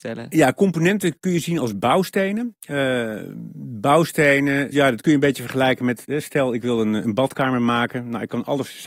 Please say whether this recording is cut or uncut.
cut